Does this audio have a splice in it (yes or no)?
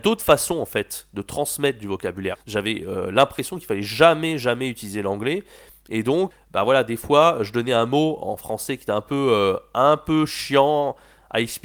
yes